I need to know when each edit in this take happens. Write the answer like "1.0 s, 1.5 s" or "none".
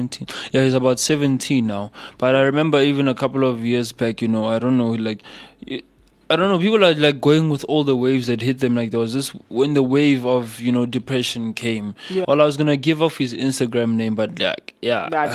12.2 s